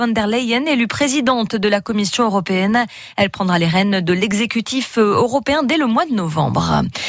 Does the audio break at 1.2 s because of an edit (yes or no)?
no